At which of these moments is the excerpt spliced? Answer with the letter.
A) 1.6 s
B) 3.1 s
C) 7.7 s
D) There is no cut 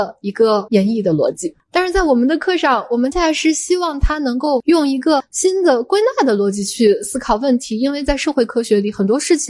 B